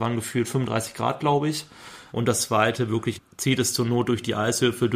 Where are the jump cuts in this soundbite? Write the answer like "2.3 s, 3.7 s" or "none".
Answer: 2.1 s, 3.2 s